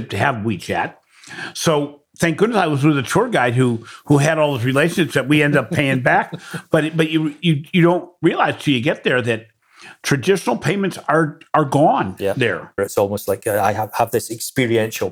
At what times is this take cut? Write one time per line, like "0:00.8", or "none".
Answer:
0:12.8